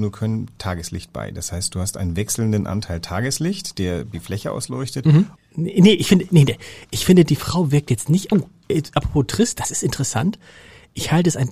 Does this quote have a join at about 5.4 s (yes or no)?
yes